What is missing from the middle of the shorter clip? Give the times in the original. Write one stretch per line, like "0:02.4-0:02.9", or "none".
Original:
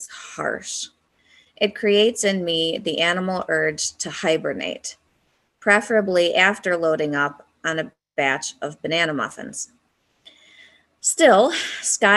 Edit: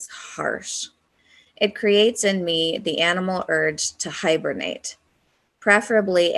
none